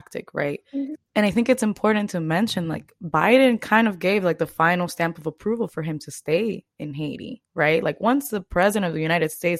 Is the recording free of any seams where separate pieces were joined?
no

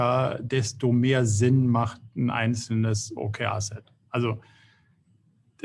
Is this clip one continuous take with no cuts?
yes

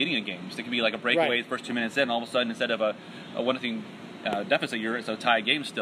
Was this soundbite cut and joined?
no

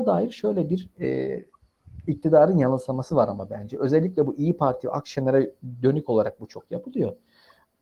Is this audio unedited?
yes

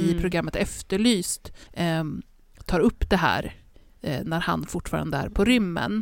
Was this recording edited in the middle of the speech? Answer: yes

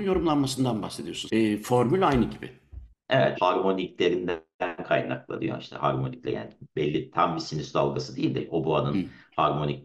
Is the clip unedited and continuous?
no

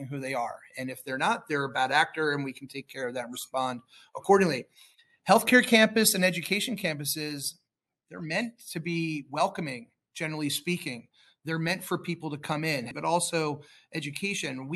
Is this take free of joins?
no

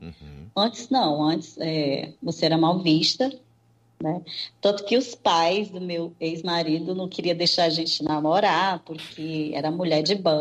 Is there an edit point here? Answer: no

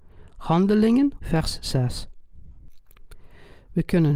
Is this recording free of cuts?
no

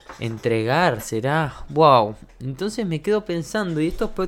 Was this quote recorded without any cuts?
yes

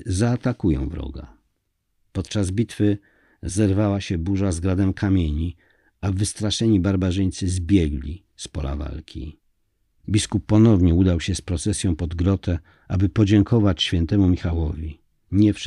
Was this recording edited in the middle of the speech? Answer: no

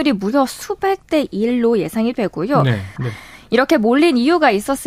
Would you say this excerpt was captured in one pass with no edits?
no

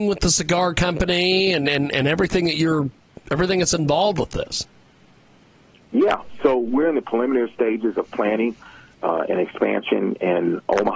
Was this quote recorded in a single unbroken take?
yes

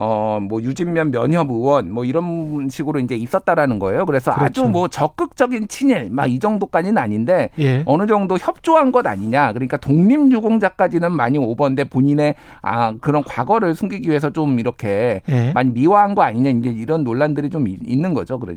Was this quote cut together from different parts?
no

